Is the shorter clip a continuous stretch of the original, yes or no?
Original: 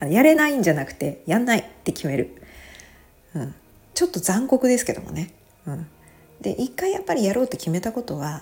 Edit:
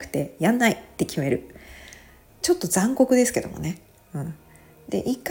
no